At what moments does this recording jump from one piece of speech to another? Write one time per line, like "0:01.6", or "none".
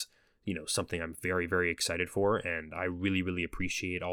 none